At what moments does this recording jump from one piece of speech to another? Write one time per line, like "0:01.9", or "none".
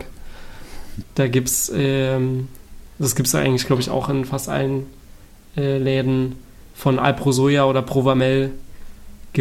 0:01.0